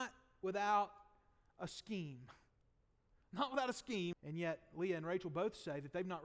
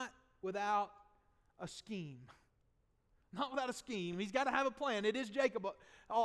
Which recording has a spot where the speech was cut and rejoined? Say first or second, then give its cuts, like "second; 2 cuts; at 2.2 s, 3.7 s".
first; 1 cut; at 4.1 s